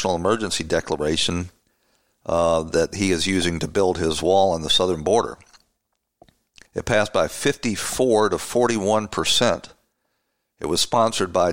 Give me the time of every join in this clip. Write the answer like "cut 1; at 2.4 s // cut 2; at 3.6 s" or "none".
cut 1; at 6.7 s